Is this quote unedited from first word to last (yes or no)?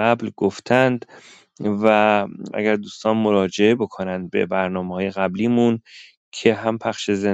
no